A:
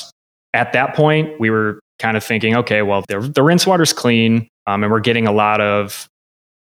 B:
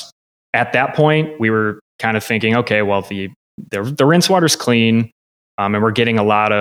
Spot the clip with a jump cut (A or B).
A